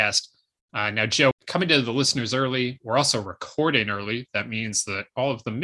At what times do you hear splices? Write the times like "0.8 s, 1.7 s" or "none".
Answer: 1.3 s